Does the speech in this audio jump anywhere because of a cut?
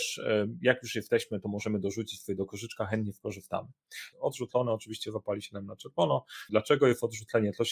yes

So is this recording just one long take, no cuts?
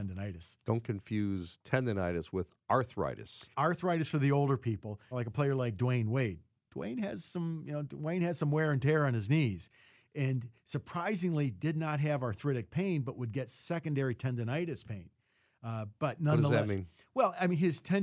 no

